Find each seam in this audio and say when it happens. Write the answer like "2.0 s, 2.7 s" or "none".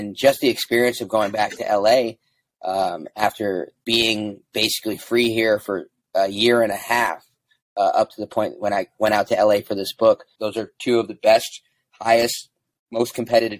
3.8 s, 10.3 s